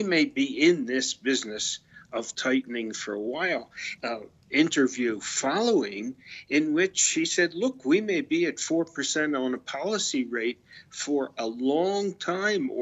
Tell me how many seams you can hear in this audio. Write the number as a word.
one